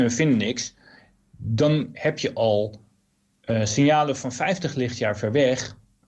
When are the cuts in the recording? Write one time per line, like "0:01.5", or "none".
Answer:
none